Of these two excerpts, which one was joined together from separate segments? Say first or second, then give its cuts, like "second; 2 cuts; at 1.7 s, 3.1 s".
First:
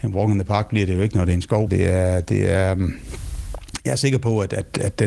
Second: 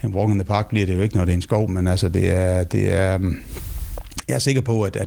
first; 1 cut; at 1.7 s